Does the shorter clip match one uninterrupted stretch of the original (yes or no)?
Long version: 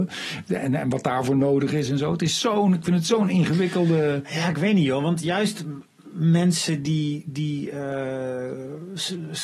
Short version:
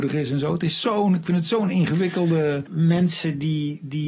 no